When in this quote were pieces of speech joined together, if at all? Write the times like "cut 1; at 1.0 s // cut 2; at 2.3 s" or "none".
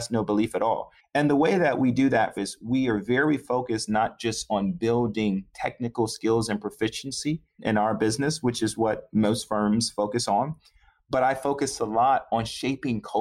cut 1; at 1.0 s // cut 2; at 2.4 s